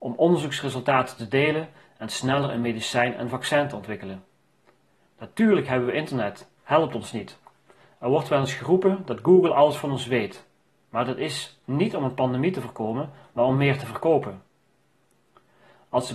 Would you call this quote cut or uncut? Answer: cut